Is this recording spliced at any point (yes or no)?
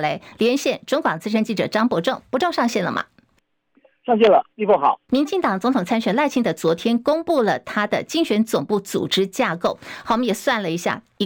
yes